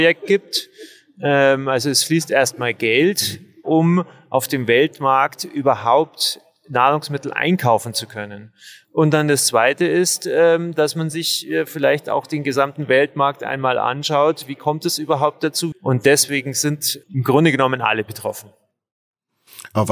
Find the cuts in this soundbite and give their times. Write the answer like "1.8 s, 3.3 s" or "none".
15.7 s, 17.0 s